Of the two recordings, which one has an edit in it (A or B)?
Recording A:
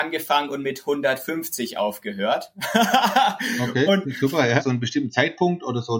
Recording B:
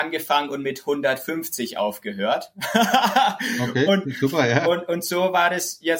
A